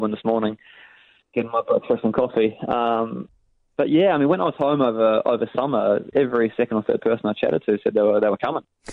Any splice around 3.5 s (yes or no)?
no